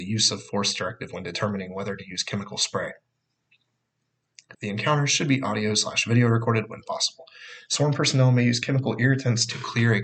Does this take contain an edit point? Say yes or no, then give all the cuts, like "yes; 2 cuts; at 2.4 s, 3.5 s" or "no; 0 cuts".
yes; 2 cuts; at 4.5 s, 7.7 s